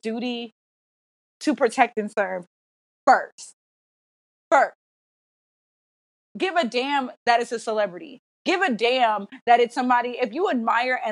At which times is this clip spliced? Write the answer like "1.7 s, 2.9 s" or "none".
none